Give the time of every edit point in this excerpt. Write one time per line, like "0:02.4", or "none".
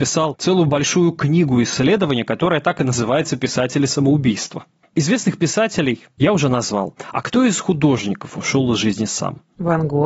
0:04.8